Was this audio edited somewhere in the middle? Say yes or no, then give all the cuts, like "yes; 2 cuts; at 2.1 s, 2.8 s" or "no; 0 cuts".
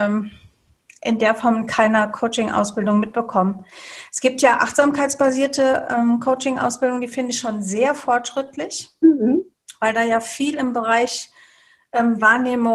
no; 0 cuts